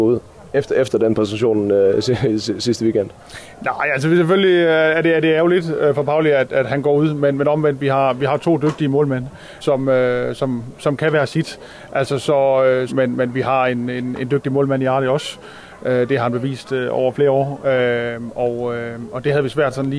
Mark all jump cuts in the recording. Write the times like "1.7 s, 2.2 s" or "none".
9.6 s, 12.9 s, 17.6 s